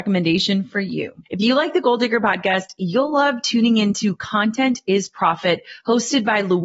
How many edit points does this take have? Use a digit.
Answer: 1